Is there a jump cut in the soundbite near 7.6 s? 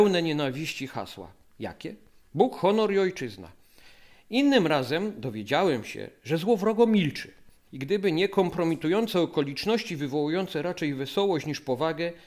yes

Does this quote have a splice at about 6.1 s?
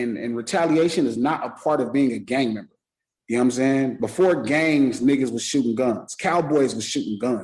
no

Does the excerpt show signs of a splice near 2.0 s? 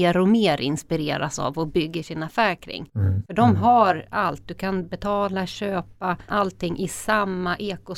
no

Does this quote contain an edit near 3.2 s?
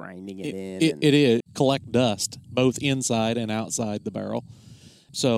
no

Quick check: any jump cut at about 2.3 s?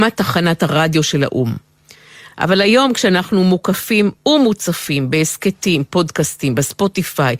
yes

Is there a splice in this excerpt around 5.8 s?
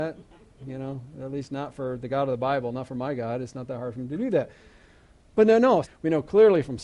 yes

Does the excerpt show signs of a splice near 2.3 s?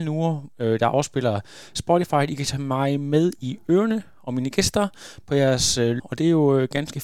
no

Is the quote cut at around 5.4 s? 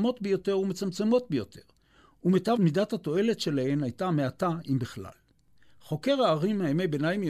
no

